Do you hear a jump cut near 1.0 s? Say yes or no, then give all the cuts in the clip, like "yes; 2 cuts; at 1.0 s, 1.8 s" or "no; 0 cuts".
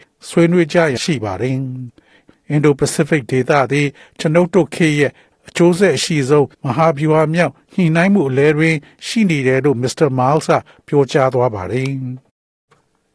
yes; 2 cuts; at 1.0 s, 6.5 s